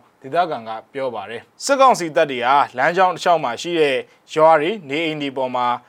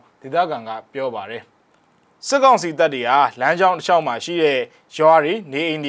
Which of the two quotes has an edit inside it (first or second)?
first